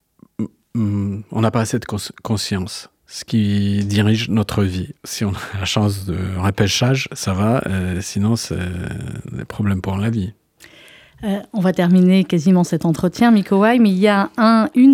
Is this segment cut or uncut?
cut